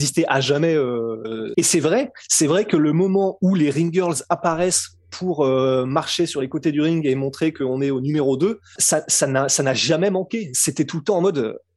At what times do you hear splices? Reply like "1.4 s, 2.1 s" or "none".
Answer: 1.5 s, 8.8 s